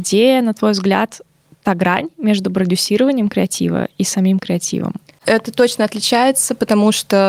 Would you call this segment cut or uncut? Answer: uncut